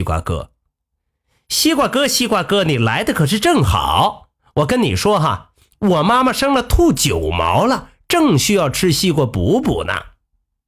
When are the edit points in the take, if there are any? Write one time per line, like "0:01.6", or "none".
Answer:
none